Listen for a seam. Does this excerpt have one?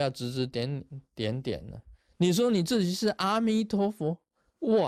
no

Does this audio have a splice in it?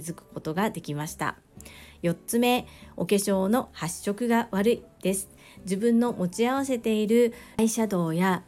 no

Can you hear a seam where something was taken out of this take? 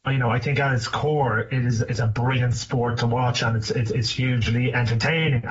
no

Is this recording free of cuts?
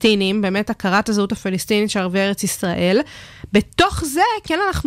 yes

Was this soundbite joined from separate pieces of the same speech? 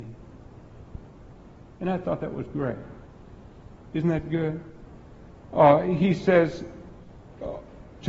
no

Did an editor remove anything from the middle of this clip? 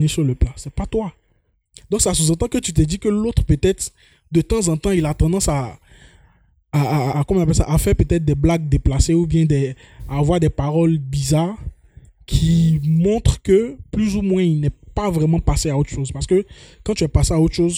yes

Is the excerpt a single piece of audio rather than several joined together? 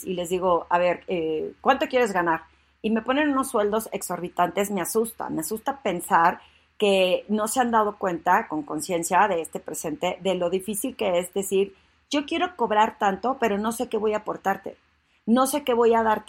yes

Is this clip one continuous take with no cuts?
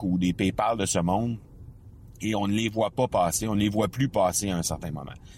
yes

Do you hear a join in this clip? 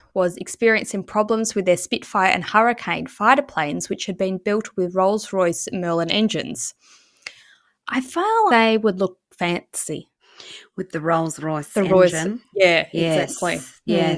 yes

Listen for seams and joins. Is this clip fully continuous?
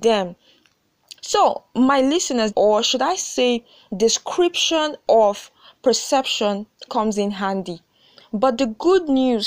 no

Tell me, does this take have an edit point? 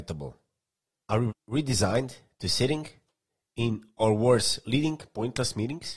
yes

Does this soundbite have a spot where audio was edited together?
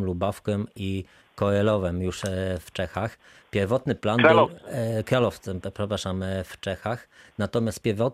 no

